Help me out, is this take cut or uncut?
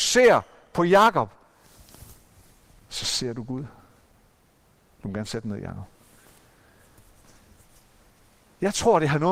uncut